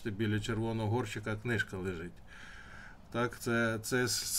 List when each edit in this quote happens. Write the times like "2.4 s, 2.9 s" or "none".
none